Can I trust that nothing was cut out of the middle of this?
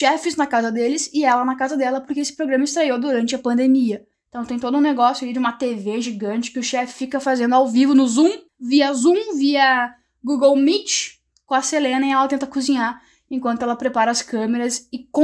no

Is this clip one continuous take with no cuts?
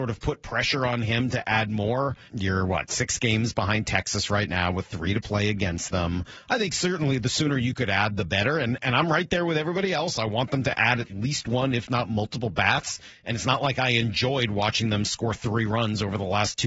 no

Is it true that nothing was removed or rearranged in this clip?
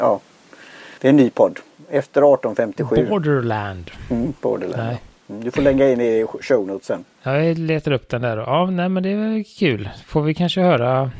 no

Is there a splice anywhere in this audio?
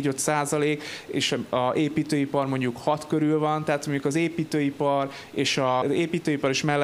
yes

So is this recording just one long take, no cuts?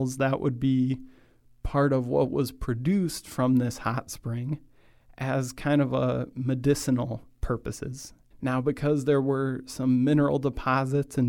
no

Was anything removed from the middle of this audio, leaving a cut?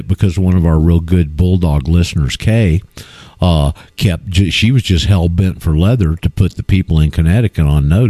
no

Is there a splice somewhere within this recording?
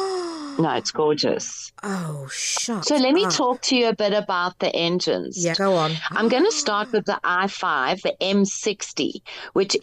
yes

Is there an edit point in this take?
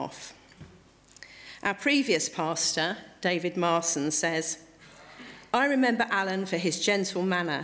no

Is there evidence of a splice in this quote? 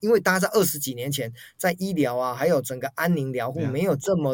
no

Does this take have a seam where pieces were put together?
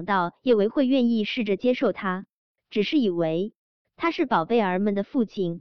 no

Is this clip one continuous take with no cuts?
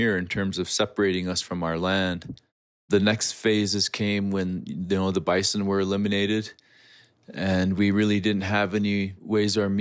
yes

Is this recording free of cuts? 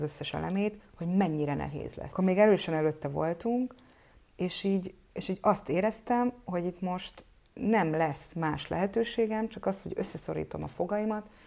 yes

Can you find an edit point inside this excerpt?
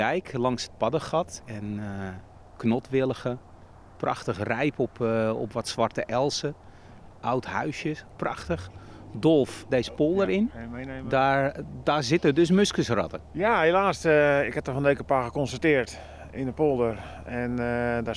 yes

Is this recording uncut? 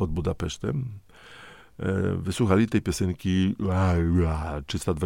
yes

